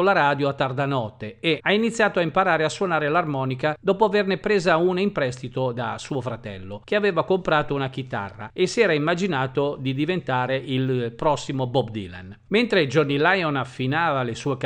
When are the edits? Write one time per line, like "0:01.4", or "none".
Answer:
0:01.6